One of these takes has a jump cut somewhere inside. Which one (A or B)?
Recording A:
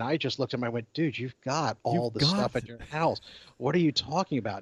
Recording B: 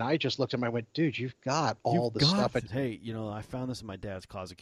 B